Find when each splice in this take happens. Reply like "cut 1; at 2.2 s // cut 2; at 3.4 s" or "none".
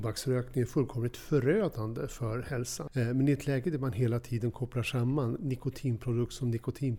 cut 1; at 2.9 s